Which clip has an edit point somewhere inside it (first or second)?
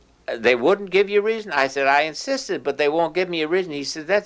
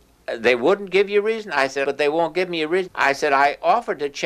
second